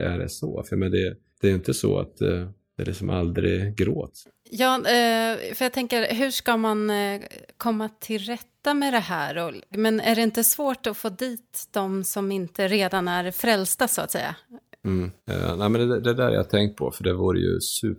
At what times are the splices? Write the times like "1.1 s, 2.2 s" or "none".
9.7 s, 15.2 s